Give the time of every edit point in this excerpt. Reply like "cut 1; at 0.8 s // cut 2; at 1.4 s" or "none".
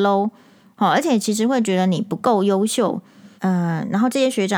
cut 1; at 3.4 s